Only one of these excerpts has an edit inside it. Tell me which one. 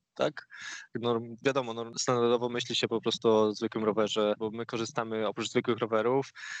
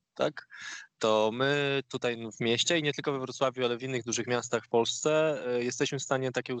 first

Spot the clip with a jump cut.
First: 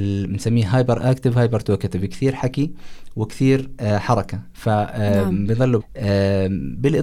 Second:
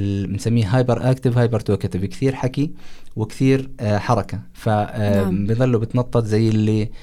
first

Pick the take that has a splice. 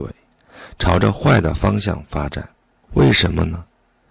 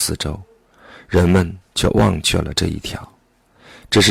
first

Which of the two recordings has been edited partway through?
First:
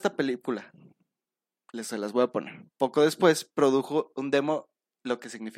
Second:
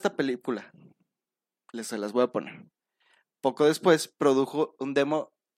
first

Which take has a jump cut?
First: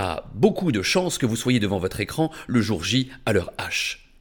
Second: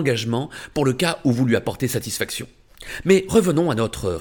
second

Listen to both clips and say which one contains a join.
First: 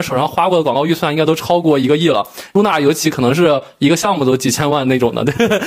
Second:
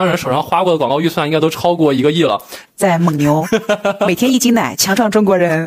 second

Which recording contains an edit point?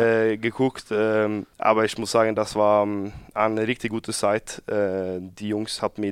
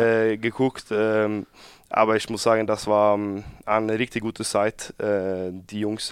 first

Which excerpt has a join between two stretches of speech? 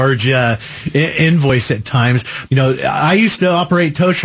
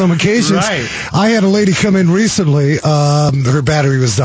first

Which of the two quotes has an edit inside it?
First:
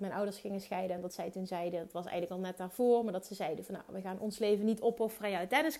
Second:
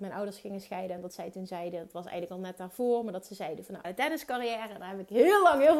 second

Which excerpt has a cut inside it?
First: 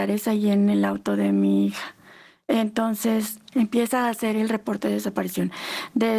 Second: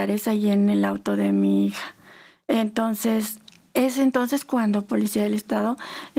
first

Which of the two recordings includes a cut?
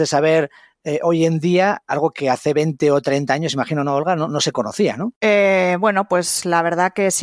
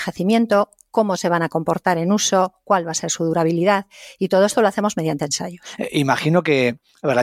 first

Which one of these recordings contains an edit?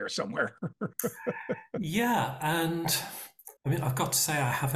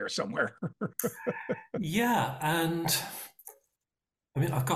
first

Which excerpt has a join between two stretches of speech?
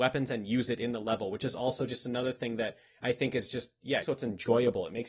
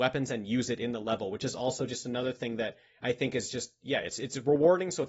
first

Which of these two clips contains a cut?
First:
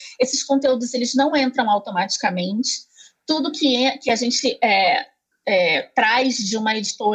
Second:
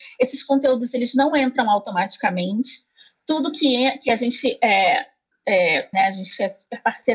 second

